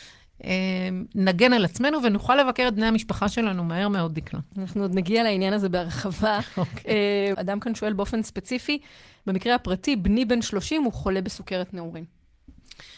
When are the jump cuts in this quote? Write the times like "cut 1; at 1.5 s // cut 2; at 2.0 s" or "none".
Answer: cut 1; at 7.3 s

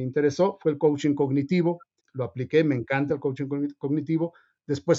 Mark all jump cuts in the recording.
cut 1; at 2.0 s

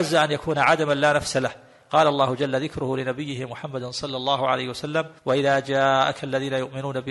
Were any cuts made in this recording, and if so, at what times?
cut 1; at 5.2 s

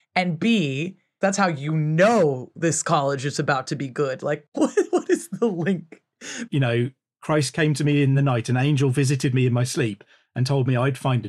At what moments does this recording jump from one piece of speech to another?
cut 1; at 1.2 s // cut 2; at 6.5 s

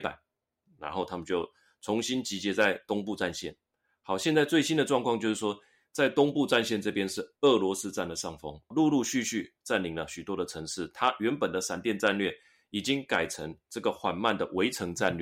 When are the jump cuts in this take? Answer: none

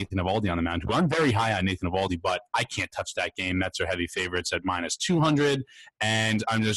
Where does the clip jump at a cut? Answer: none

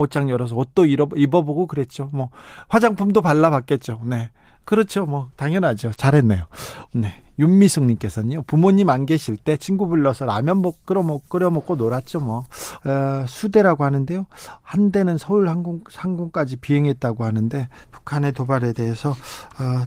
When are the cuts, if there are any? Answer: cut 1; at 6.9 s // cut 2; at 12.8 s

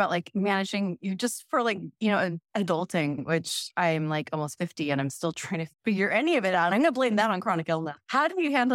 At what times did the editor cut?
none

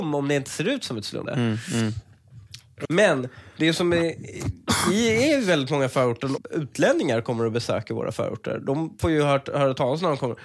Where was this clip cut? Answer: cut 1; at 1.3 s // cut 2; at 2.8 s // cut 3; at 6.4 s

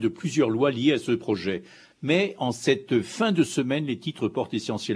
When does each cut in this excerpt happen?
none

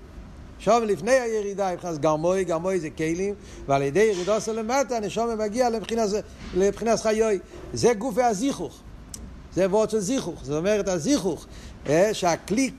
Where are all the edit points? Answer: none

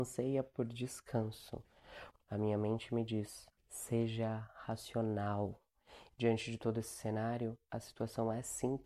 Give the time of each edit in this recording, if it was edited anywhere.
cut 1; at 2.1 s // cut 2; at 3.6 s // cut 3; at 6.1 s

